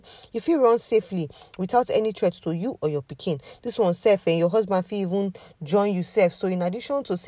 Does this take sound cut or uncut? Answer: uncut